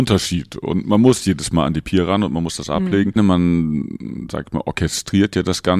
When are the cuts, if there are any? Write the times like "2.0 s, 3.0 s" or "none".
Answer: 3.2 s